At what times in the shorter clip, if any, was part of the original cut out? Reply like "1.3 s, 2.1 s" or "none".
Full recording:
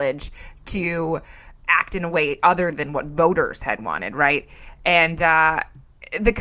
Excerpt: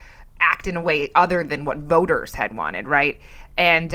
none